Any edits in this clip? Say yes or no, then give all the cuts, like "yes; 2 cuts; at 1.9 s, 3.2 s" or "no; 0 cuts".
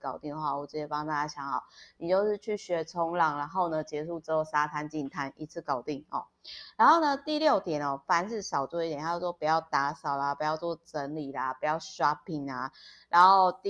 no; 0 cuts